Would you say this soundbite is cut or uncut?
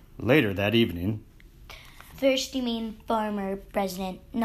cut